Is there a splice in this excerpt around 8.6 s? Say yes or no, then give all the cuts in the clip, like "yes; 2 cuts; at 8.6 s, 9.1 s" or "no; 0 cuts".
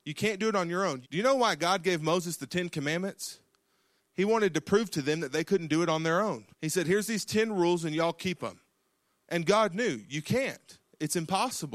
no; 2 cuts; at 1.0 s, 6.5 s